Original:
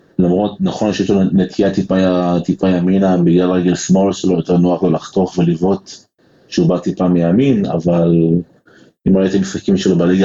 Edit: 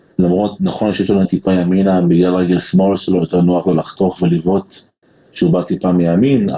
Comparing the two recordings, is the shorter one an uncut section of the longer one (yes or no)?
no